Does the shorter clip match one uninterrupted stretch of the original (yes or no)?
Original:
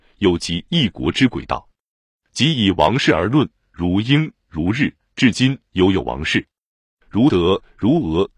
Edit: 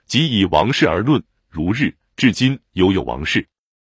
no